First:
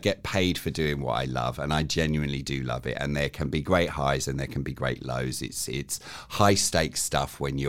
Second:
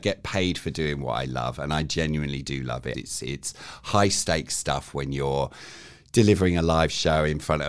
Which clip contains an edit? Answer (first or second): second